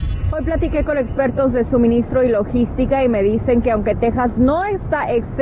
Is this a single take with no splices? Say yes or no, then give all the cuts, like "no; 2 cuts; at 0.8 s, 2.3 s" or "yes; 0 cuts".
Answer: yes; 0 cuts